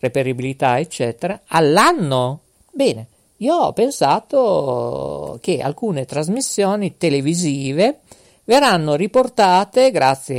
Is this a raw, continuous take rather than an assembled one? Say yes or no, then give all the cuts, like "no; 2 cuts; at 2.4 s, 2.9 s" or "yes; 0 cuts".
no; 1 cut; at 2.5 s